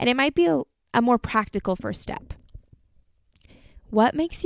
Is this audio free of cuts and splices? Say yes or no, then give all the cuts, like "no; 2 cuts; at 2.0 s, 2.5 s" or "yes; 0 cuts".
yes; 0 cuts